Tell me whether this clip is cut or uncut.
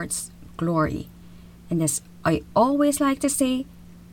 uncut